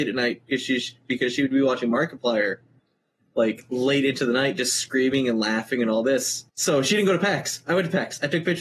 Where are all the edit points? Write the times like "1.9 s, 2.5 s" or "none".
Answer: 6.5 s